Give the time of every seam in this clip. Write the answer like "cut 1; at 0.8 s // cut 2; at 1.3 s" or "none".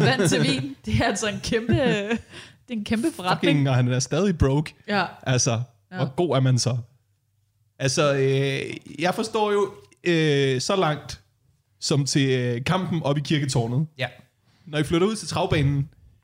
none